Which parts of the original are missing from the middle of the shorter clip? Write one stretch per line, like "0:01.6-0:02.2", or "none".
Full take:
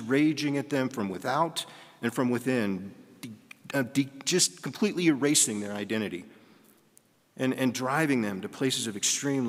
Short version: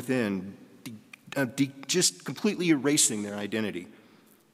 none